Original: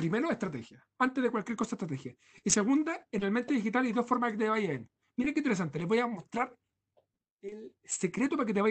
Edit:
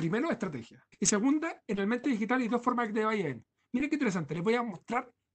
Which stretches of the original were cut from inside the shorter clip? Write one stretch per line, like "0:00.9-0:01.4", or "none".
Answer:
0:00.9-0:02.4